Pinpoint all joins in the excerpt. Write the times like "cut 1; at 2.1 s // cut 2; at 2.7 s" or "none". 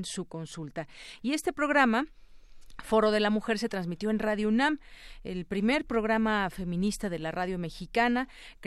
none